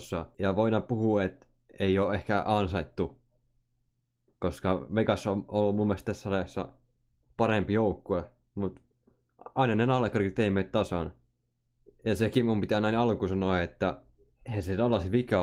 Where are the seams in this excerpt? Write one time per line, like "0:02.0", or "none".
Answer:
none